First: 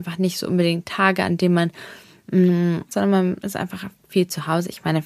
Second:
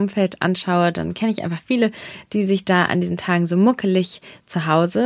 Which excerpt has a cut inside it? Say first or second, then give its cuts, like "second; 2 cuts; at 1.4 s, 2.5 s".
first; 1 cut; at 2.9 s